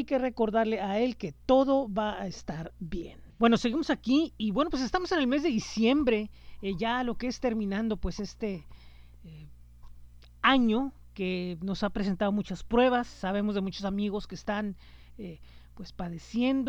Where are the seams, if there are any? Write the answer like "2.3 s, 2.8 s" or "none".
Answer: none